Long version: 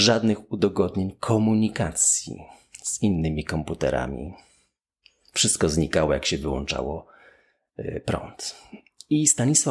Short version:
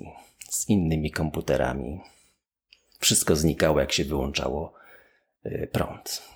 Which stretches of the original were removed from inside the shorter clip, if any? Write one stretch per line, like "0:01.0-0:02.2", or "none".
none

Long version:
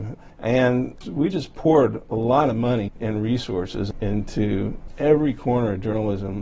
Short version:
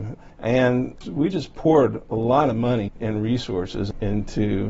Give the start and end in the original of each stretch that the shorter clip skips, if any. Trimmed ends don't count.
none

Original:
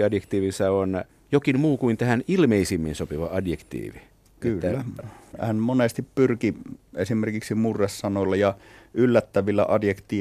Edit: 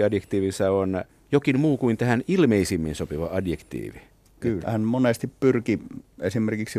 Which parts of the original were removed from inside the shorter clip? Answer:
0:04.6-0:05.4

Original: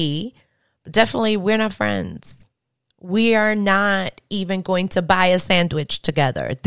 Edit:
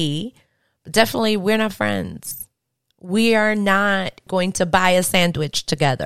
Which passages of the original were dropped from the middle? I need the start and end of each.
0:04.3-0:04.6

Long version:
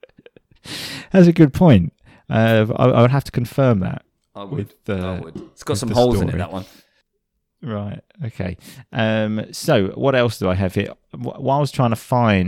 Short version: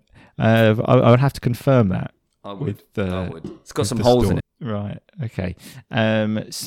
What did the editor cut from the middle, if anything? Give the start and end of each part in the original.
0:06.3-0:07.4

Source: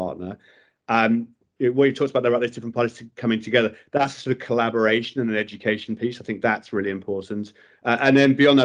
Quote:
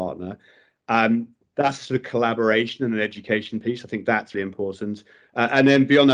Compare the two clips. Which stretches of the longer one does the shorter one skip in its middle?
0:01.5-0:03.9
0:06.7-0:06.8

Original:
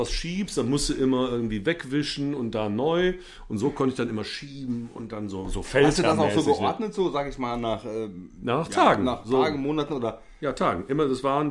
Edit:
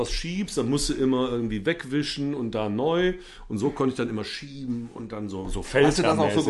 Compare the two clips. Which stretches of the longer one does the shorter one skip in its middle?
none

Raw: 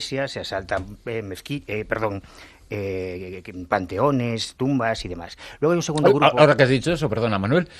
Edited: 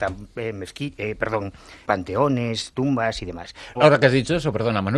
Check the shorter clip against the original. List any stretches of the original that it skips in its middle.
0:02.5-0:03.7
0:05.6-0:06.3

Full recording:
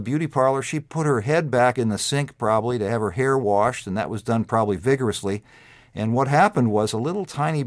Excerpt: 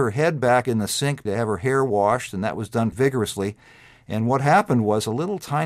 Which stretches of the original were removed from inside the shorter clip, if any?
0:02.4-0:02.8
0:04.5-0:04.8

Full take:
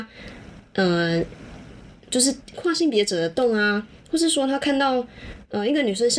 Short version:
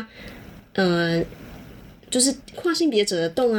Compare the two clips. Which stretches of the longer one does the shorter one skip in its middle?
none

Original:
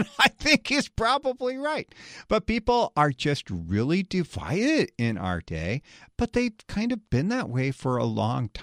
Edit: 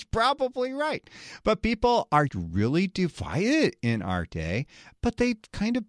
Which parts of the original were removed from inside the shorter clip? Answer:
0:03.1-0:03.4

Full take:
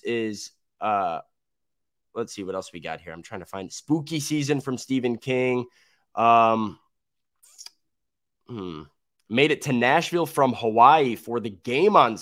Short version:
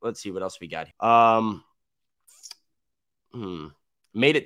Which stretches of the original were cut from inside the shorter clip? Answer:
0:03.0-0:06.1

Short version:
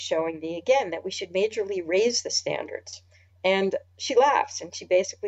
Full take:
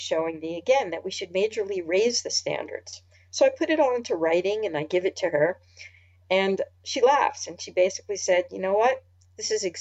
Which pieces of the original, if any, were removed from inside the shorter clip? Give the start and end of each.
0:03.3-0:06.1

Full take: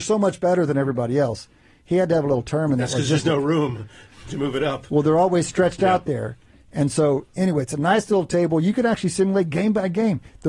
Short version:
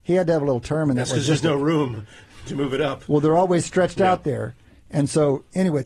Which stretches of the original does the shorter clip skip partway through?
none

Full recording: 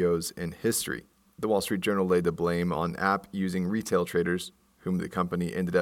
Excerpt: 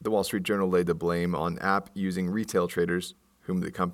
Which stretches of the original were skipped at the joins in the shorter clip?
none

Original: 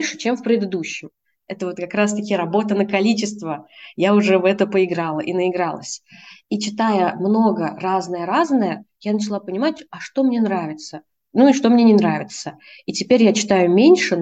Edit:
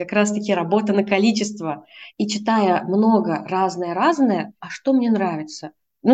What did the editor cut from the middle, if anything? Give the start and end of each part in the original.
0:03.9-0:06.4
0:08.9-0:09.9

